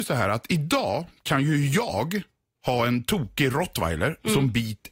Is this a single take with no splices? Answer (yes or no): yes